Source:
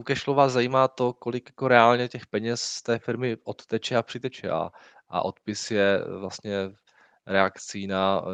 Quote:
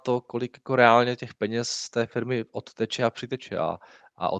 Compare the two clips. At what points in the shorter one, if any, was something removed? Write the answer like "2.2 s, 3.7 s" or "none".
none